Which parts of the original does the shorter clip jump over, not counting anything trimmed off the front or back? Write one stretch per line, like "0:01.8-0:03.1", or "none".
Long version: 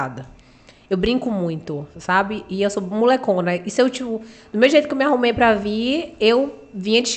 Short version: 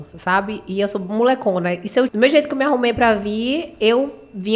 0:03.9-0:04.5